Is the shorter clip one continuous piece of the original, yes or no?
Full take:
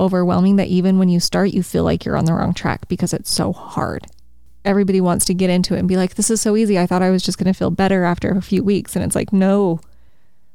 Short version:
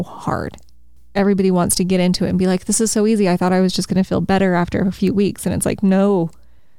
yes